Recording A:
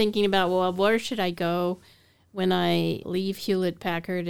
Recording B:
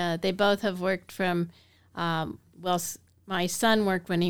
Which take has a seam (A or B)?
A